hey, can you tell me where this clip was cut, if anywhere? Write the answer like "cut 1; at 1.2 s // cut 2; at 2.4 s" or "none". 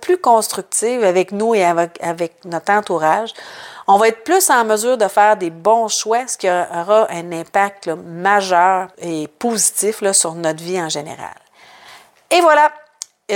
cut 1; at 8.9 s